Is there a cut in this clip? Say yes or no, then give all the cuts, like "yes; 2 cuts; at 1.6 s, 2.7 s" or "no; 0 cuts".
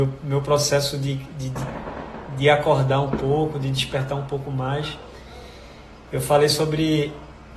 no; 0 cuts